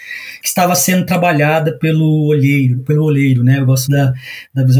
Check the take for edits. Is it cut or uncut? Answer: cut